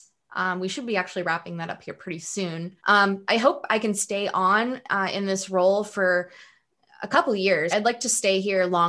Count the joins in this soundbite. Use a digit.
2